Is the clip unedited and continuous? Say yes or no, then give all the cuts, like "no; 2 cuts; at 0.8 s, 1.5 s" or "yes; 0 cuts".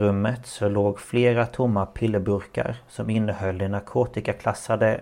yes; 0 cuts